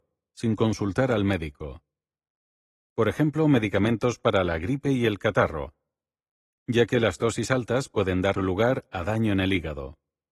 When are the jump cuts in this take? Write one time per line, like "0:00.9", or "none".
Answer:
0:02.8

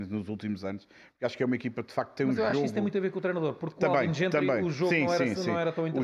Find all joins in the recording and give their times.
none

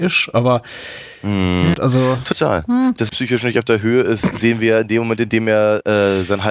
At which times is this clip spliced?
0:01.7
0:03.1

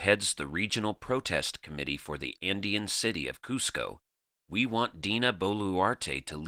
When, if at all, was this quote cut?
none

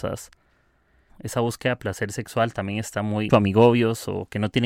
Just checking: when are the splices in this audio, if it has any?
0:01.1
0:03.3

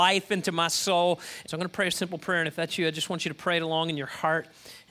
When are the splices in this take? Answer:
0:01.4

